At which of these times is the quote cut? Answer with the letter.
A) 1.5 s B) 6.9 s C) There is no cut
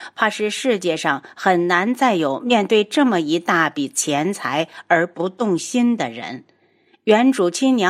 C